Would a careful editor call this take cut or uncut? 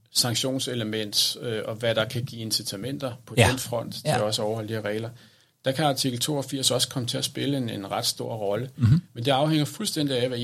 uncut